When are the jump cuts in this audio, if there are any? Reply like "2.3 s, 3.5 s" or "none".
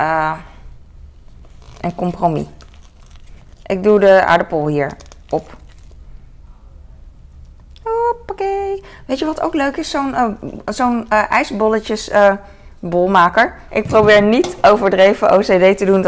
13.7 s